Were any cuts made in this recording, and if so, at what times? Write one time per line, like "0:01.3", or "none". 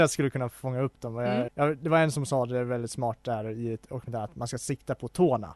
0:01.5

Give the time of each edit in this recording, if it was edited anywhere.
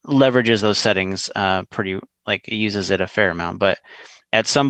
none

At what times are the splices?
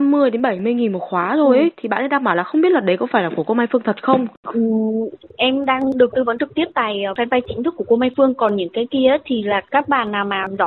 none

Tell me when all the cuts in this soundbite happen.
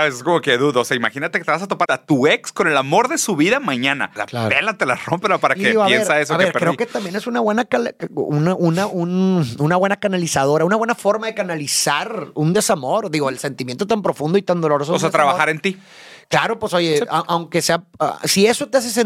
0:01.8
0:04.2

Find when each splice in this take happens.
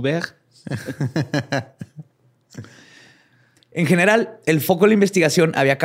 none

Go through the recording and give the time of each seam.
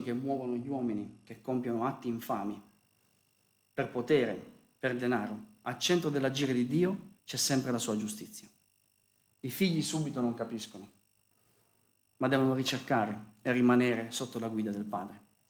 0:07.2
0:09.3

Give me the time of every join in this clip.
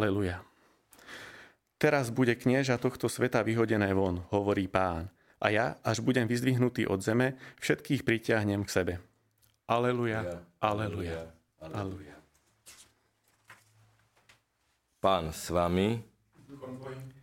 none

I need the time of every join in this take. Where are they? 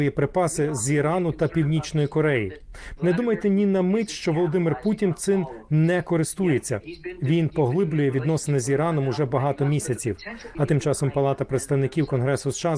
0:03.0
0:10.5

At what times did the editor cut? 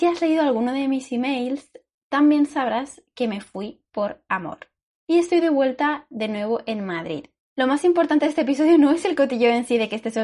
0:04.9
0:07.4

